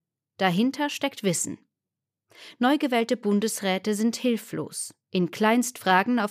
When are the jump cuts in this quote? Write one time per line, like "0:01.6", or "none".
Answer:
none

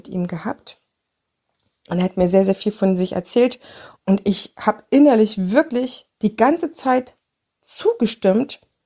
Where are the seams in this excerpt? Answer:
0:04.0
0:06.1

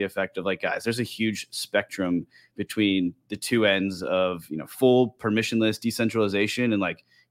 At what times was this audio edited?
none

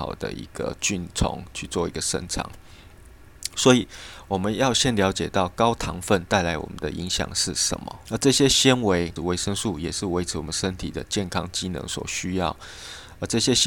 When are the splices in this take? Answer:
0:08.1
0:09.2

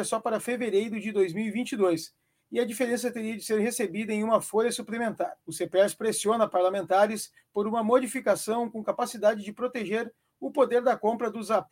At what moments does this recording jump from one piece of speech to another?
0:05.4

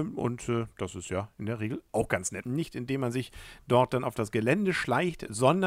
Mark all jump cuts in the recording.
0:02.4

